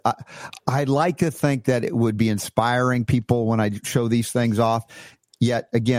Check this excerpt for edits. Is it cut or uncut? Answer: uncut